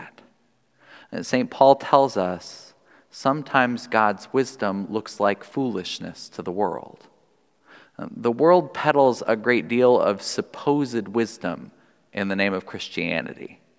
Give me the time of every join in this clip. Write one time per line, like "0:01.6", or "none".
none